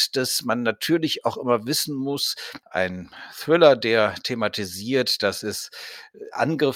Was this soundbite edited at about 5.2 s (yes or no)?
no